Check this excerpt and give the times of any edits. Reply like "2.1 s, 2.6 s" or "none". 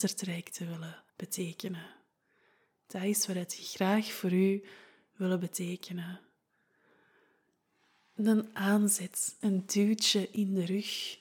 1.1 s, 9.4 s